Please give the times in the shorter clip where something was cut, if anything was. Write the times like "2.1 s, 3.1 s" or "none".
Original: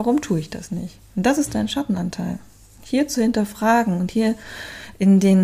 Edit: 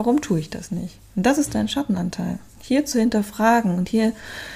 2.5 s